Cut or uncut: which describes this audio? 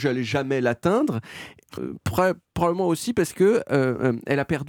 cut